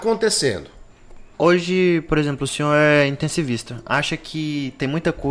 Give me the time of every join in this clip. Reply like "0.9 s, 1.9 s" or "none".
1.3 s